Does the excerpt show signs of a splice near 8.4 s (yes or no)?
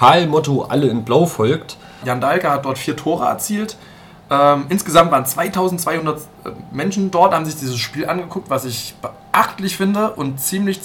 no